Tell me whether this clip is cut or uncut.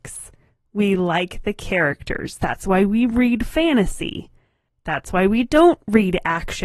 uncut